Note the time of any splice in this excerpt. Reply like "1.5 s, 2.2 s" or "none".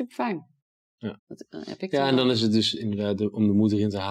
1.2 s